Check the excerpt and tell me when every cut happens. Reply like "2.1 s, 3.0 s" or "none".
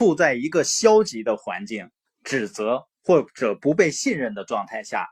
2.1 s